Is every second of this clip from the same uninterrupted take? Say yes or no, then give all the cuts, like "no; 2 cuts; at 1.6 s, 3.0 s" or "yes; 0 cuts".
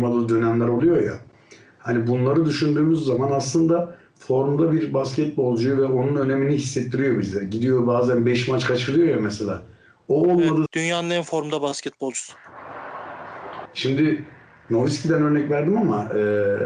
no; 2 cuts; at 10.7 s, 13.6 s